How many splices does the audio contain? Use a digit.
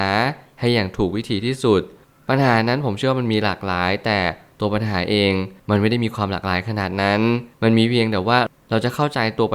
2